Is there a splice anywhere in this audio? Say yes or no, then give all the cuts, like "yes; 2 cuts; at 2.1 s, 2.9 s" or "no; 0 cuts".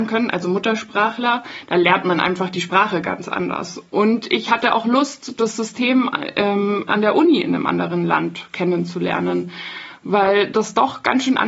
no; 0 cuts